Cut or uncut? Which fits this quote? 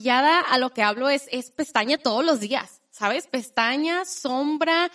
uncut